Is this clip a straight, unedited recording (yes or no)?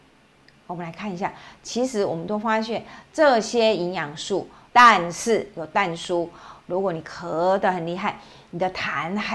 no